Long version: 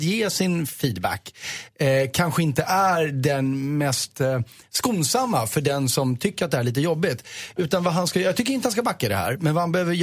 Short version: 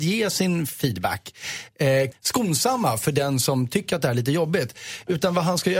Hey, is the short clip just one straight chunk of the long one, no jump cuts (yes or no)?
no